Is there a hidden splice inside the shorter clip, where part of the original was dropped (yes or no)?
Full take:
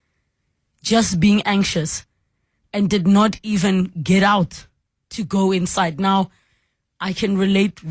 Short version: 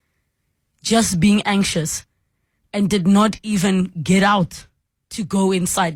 no